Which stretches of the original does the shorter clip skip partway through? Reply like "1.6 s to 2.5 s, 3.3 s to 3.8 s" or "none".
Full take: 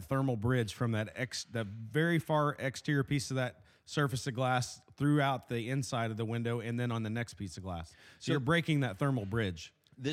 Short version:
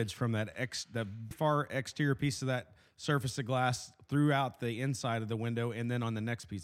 1.9 s to 2.2 s